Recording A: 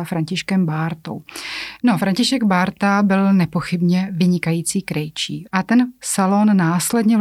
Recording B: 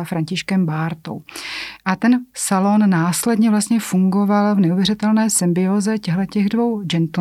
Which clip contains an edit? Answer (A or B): A